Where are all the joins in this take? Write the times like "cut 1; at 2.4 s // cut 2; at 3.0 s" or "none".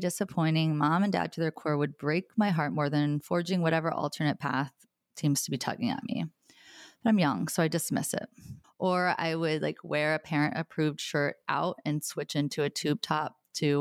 cut 1; at 6.9 s // cut 2; at 8.6 s